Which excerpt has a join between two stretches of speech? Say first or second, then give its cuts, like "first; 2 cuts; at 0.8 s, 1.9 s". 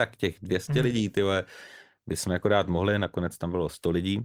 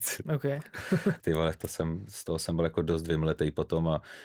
second; 1 cut; at 1.2 s